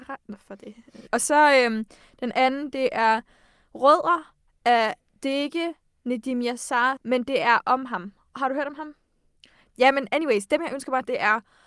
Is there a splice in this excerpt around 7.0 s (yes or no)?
yes